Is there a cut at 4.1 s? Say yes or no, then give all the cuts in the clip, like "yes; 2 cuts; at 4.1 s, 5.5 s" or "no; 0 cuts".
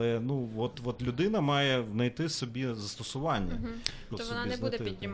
yes; 1 cut; at 4.1 s